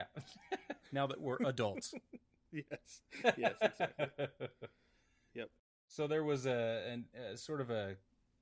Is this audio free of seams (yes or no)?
yes